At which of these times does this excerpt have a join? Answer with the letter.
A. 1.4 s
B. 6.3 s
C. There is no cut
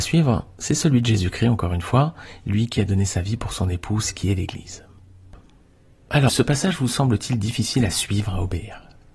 B